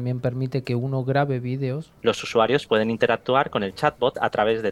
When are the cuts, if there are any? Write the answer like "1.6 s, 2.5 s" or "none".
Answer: 2.0 s